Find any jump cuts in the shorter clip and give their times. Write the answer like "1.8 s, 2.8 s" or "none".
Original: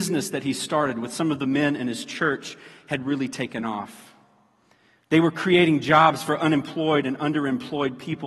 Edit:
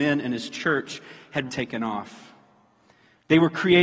1.5 s